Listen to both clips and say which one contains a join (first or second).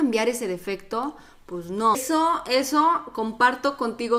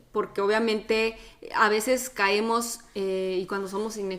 first